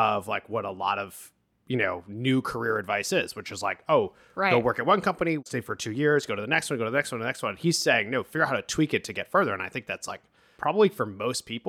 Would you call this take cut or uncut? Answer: uncut